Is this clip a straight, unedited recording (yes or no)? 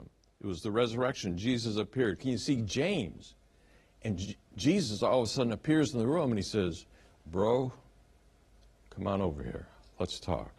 no